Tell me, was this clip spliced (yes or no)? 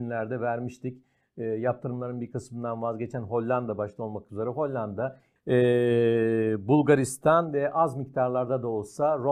yes